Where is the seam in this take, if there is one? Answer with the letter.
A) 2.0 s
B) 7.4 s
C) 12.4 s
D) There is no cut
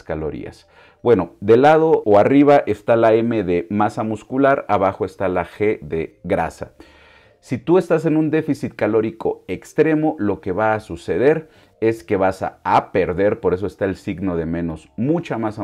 A